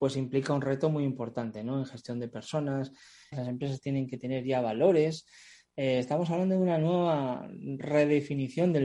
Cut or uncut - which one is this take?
cut